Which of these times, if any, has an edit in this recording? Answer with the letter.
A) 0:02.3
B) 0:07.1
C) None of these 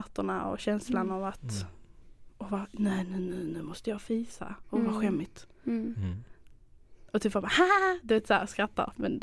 C